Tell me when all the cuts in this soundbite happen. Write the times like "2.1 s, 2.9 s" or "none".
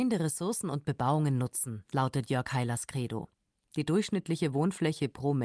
none